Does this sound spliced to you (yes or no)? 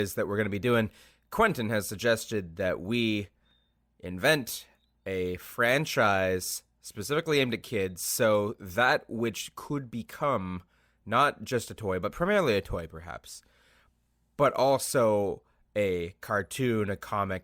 no